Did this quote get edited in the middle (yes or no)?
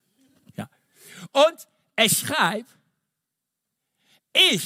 no